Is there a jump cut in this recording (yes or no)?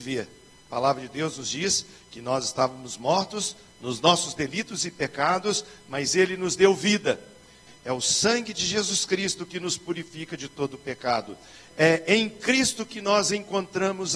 yes